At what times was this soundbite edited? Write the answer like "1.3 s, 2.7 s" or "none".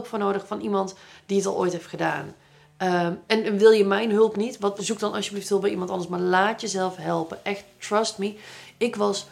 3.3 s, 4.8 s